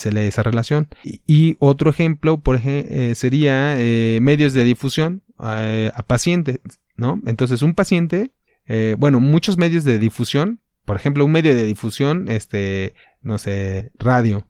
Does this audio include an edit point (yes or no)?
no